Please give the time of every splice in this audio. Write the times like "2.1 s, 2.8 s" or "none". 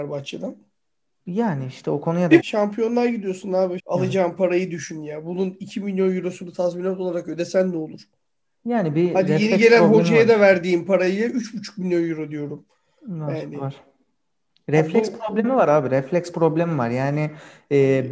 2.4 s, 3.8 s